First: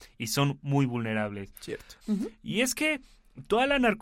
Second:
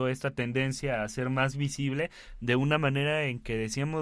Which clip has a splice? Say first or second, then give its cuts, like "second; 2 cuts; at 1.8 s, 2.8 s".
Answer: first; 1 cut; at 2.0 s